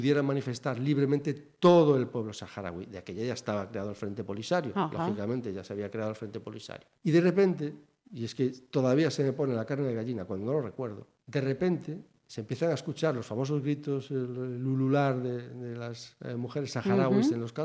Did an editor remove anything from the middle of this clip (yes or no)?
no